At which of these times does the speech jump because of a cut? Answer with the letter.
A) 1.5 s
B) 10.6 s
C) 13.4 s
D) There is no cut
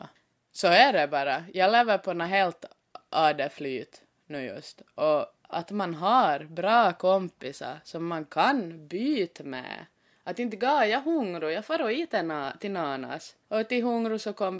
D